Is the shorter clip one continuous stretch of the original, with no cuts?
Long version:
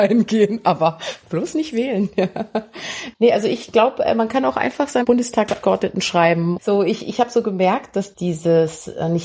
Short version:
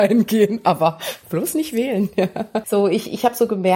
no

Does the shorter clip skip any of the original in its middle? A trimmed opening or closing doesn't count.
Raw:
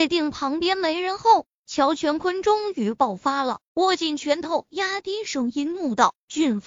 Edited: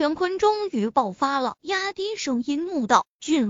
yes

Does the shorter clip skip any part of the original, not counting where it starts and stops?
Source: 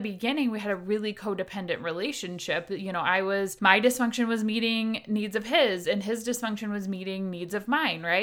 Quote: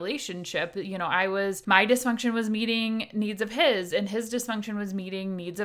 no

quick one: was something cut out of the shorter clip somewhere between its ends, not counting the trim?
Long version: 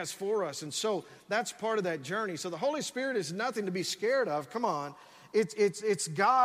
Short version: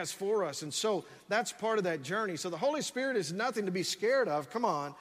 no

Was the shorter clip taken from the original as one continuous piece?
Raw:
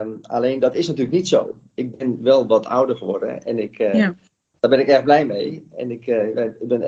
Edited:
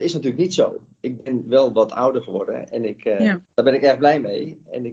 no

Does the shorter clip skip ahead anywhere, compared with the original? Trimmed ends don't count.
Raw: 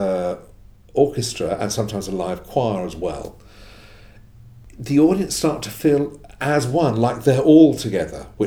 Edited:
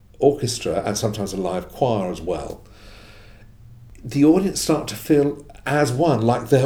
no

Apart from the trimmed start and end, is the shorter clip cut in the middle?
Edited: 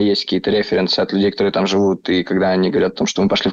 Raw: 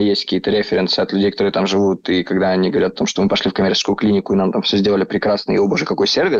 no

